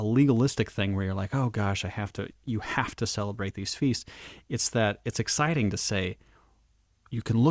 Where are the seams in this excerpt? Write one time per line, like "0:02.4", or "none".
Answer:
none